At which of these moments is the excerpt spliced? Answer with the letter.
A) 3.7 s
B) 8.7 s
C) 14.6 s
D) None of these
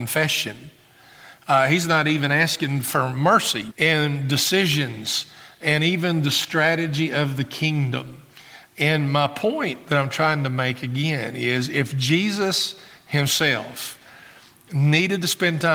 A